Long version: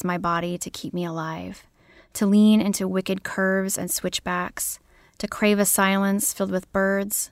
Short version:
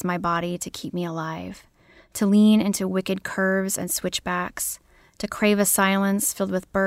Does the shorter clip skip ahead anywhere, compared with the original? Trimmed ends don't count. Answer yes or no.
no